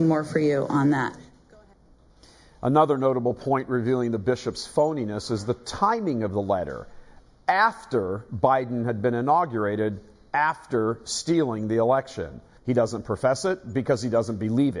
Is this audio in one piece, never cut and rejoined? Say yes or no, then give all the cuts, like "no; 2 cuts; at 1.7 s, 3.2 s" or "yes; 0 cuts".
no; 1 cut; at 12.6 s